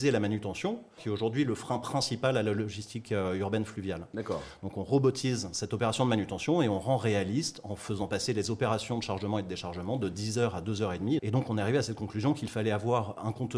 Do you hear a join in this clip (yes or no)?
yes